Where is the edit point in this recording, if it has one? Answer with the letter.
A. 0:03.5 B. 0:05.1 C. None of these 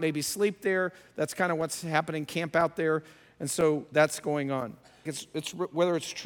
B